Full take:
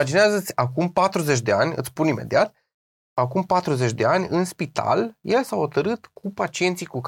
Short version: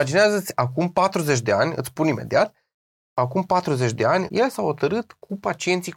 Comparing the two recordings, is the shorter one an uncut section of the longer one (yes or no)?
no